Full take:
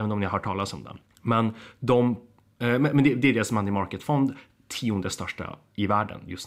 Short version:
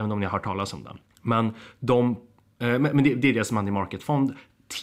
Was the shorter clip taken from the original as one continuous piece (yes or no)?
yes